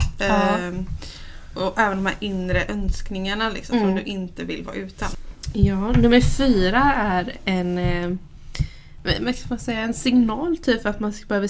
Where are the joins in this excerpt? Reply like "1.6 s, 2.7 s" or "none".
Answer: none